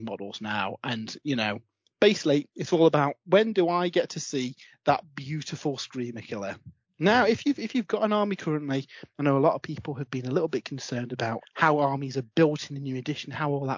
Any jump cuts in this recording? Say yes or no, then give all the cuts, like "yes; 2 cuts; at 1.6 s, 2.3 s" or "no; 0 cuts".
yes; 2 cuts; at 6.8 s, 11.4 s